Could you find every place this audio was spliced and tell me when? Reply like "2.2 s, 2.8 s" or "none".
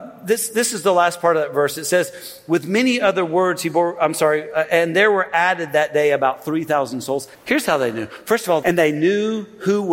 7.3 s, 8.6 s